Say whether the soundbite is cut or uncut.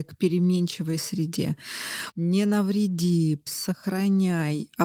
cut